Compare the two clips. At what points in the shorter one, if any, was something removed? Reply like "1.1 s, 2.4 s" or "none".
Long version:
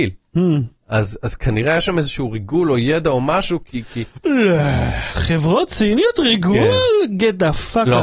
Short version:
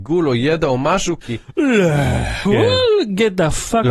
1.2 s, 2.5 s

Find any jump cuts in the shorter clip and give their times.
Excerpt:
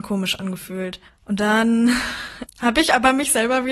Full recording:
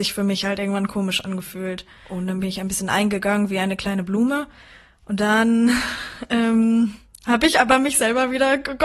1.1 s, 2.5 s

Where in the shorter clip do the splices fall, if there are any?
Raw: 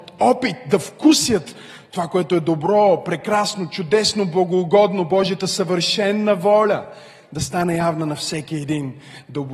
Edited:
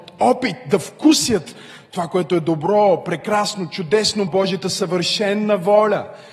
4.3 s

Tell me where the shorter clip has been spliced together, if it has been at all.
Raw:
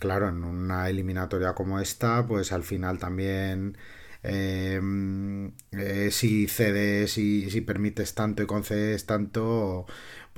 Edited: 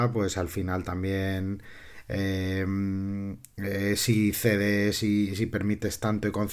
none

